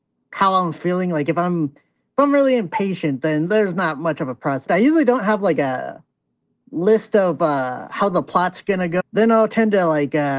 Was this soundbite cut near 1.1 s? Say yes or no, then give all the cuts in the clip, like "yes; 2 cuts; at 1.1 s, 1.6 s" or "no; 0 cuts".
no; 2 cuts; at 4.7 s, 9.0 s